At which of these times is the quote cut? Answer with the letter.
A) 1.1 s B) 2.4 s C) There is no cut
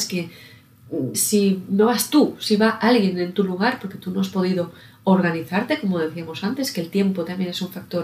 A